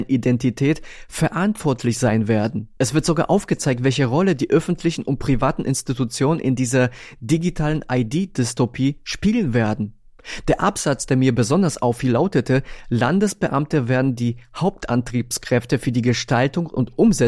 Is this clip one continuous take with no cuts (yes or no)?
yes